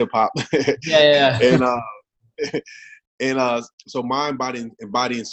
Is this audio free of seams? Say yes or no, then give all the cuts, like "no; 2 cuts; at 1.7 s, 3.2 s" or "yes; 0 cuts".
no; 1 cut; at 3.7 s